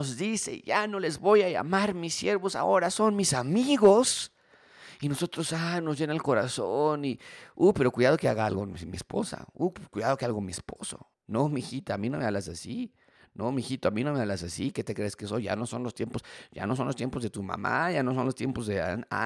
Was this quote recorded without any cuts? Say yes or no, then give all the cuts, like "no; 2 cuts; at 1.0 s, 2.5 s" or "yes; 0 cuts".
no; 1 cut; at 11.1 s